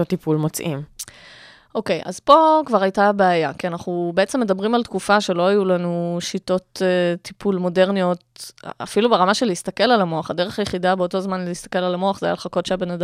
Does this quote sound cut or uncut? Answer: uncut